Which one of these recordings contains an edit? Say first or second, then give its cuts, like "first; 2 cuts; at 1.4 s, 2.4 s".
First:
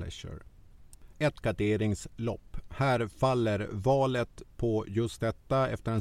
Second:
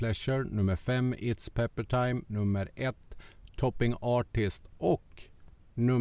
first; 1 cut; at 1.1 s